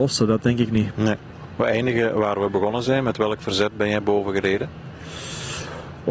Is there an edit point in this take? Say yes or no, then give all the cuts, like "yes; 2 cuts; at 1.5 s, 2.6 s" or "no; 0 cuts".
no; 0 cuts